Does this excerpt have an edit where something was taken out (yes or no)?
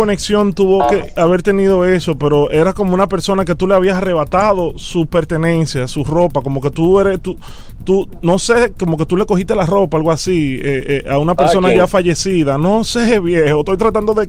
no